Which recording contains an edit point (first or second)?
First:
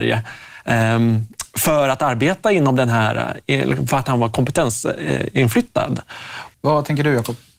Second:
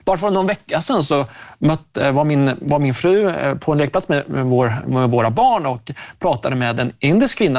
first